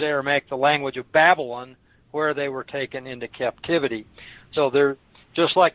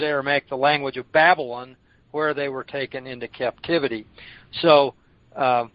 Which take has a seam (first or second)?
first